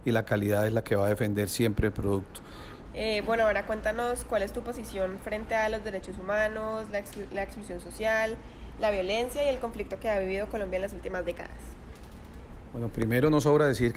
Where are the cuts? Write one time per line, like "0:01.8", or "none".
0:02.9